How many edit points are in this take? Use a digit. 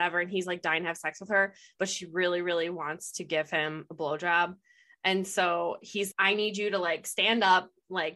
1